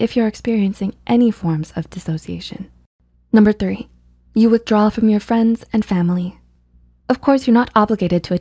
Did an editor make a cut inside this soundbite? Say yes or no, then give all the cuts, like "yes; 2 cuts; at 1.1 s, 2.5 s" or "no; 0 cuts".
yes; 1 cut; at 7.0 s